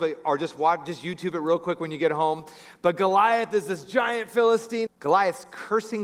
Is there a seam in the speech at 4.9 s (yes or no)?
yes